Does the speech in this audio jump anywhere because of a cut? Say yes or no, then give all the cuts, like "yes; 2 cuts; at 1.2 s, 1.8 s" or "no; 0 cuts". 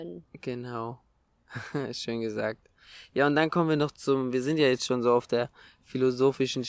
no; 0 cuts